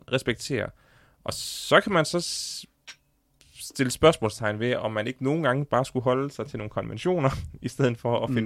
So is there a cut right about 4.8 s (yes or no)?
no